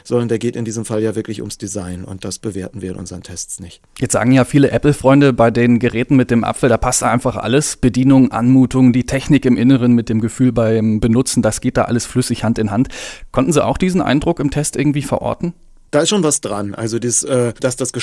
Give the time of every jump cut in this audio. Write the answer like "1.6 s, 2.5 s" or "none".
none